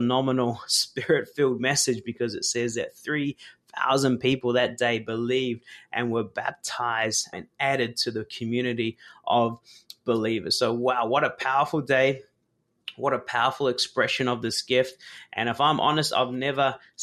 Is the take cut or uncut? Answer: cut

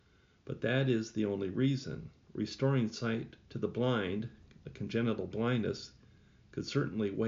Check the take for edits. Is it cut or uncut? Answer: cut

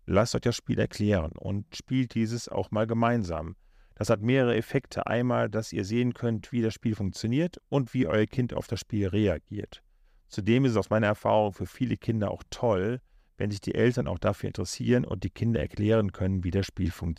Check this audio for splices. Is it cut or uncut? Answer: uncut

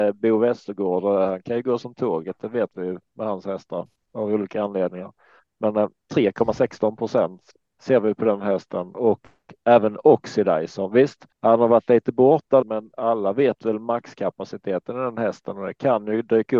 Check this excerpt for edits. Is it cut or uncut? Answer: cut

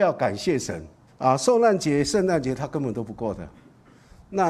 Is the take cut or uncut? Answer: cut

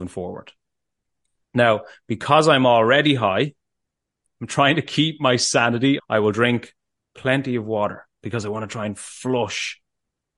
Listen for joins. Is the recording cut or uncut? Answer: cut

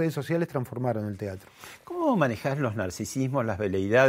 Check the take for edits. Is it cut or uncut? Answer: uncut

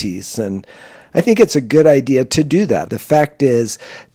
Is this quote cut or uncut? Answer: cut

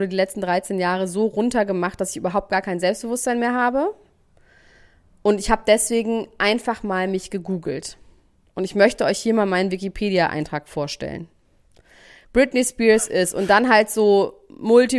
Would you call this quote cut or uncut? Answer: uncut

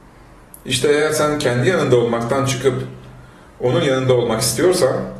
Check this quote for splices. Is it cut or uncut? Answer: uncut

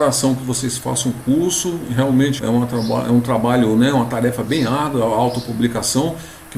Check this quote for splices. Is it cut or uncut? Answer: cut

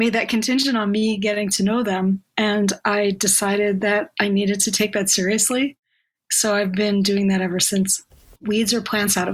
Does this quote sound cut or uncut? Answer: cut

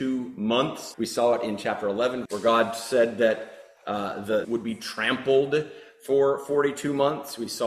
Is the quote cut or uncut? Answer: cut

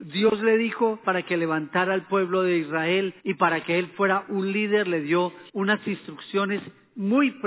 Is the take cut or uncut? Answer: cut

